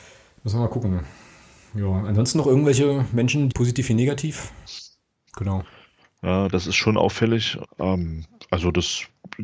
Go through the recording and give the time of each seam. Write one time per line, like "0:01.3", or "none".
0:03.5
0:05.3
0:07.6